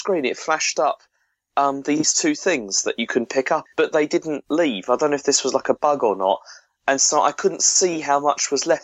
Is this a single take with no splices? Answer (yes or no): no